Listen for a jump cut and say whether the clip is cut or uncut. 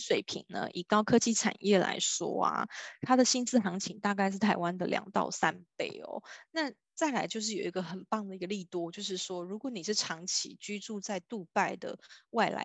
uncut